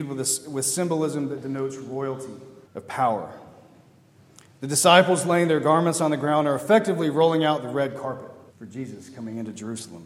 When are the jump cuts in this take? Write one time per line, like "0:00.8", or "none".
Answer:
0:02.6
0:08.5

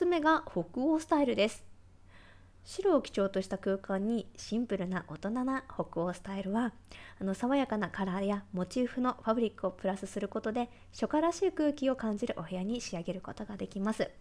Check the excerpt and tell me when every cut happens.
none

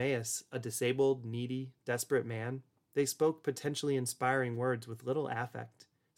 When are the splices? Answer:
none

